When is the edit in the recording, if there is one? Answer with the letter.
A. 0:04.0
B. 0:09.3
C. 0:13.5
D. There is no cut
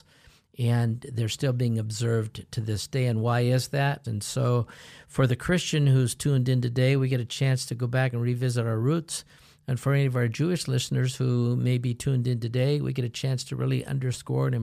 A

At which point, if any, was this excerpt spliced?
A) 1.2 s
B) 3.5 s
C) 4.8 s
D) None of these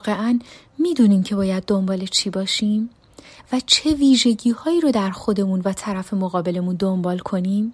D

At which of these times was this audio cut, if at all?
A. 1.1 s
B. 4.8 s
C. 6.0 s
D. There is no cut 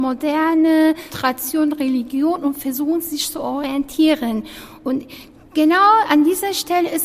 A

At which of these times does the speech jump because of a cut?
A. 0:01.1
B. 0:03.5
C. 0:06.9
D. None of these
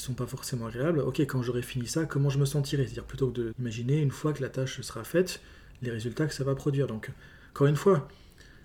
B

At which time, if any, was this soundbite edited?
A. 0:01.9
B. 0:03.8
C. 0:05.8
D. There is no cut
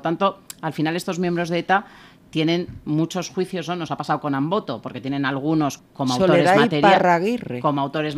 C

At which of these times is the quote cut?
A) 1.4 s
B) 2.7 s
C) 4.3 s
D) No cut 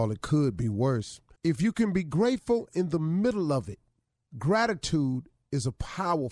A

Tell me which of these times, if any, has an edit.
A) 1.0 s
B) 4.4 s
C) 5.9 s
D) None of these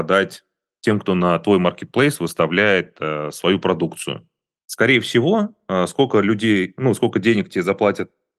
D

